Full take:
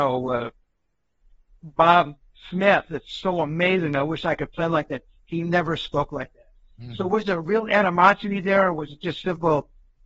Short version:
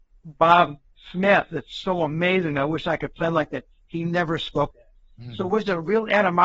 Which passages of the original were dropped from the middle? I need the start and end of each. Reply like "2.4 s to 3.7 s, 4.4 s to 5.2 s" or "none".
6.1 s to 6.3 s